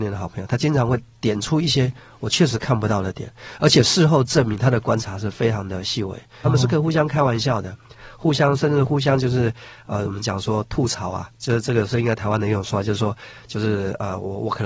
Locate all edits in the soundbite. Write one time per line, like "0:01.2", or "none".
0:06.4